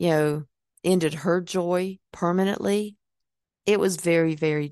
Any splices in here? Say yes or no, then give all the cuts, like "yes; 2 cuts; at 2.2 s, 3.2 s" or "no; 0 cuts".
no; 0 cuts